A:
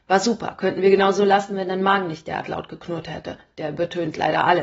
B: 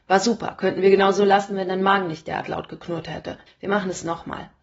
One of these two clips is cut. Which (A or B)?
B